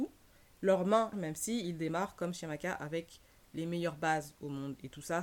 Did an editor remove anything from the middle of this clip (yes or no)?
yes